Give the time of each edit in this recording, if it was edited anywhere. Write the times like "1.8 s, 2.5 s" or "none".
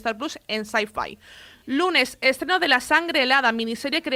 none